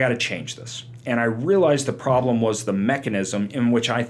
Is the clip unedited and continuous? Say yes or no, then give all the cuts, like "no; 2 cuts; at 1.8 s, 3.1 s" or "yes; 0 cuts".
yes; 0 cuts